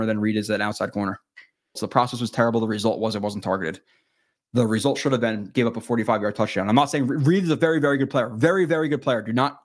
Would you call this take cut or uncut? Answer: cut